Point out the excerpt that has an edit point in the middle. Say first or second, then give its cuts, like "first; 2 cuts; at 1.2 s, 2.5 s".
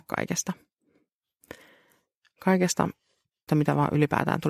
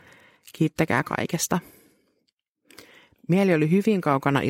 first; 1 cut; at 3.5 s